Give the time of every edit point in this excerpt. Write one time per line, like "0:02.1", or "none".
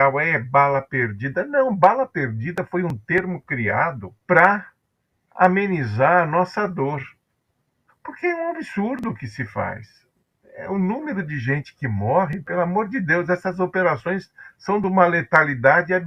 0:04.2
0:07.9